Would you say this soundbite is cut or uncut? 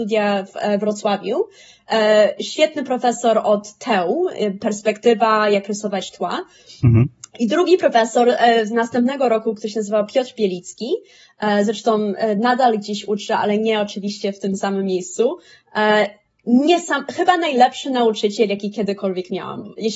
uncut